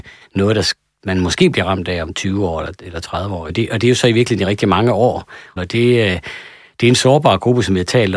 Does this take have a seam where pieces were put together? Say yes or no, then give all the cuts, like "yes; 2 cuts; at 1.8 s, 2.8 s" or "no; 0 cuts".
yes; 2 cuts; at 3.5 s, 5.6 s